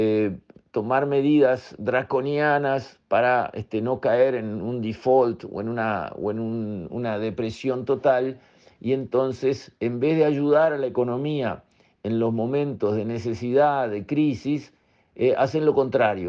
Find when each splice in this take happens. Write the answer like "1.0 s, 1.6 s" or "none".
none

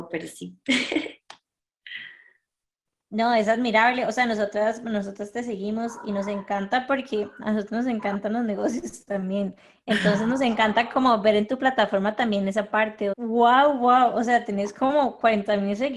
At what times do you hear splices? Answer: 13.1 s

